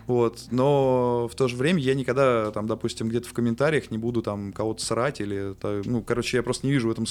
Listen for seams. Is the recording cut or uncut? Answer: uncut